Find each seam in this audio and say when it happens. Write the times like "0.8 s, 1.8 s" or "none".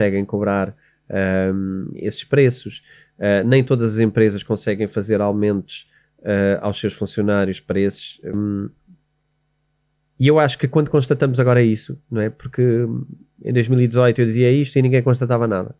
8.3 s

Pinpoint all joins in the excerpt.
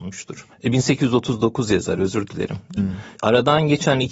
2.8 s

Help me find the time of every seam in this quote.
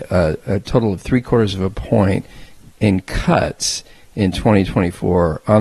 none

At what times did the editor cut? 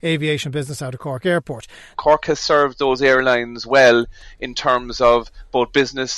1.9 s

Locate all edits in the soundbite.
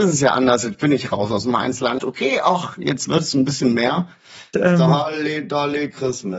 2.0 s, 4.5 s

